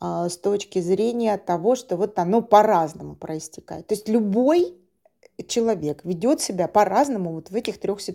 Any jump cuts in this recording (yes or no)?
no